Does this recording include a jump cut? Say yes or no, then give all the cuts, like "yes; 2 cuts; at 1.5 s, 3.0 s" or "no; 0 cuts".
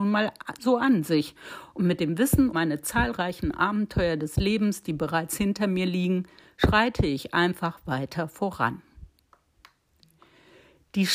yes; 1 cut; at 2.5 s